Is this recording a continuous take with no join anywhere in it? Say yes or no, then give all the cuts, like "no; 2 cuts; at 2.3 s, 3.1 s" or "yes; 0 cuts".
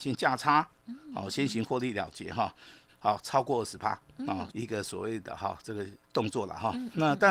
no; 3 cuts; at 2.9 s, 4.5 s, 6.0 s